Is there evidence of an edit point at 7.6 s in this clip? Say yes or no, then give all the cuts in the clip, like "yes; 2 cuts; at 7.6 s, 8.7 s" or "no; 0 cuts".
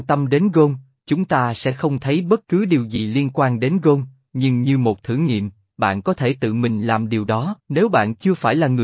yes; 1 cut; at 7.6 s